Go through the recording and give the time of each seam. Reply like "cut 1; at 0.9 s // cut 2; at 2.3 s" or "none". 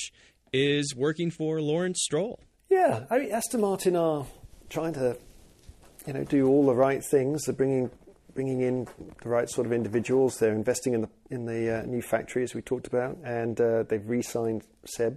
cut 1; at 2.5 s